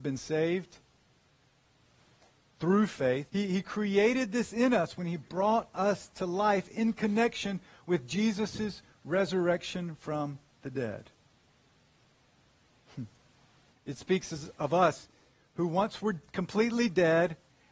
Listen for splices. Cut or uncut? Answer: cut